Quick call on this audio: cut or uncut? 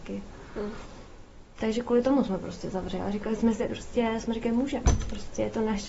cut